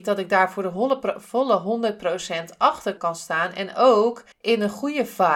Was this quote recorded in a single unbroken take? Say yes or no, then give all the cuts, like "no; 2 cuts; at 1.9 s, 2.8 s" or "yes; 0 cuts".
no; 1 cut; at 4.3 s